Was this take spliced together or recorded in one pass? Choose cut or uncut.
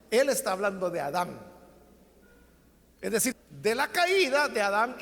cut